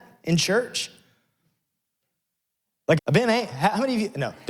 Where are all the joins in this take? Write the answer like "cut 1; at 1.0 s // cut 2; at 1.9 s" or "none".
cut 1; at 3.0 s